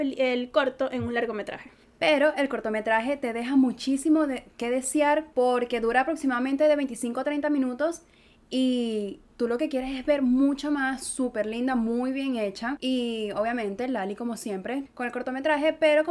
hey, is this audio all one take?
no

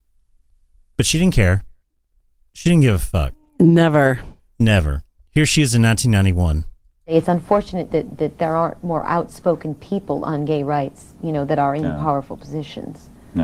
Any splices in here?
yes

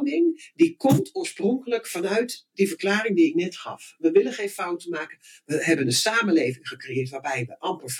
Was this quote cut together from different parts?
no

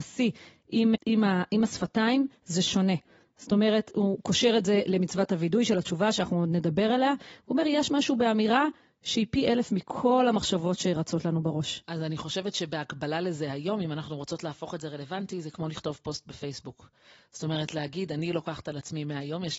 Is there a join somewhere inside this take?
yes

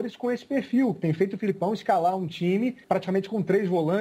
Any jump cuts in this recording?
yes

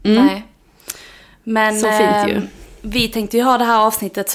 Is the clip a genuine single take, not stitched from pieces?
yes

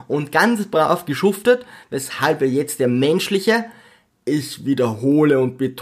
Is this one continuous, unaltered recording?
yes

